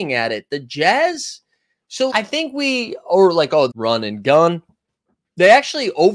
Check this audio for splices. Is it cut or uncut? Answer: cut